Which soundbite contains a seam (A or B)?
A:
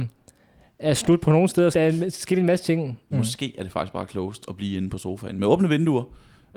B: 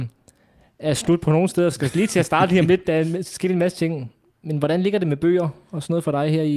A